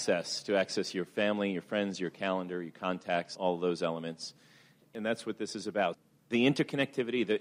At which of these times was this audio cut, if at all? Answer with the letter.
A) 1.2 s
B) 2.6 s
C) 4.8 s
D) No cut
C